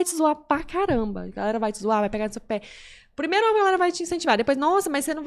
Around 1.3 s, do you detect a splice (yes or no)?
no